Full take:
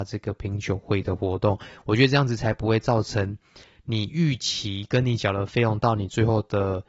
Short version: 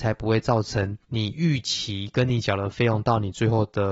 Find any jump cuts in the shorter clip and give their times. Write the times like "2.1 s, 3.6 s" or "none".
1.0 s